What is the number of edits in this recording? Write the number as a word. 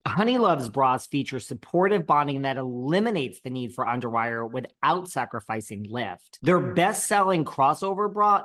zero